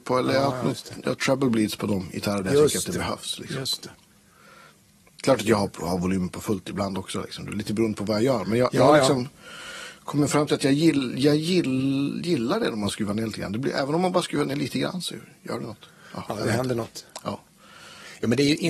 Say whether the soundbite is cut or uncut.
uncut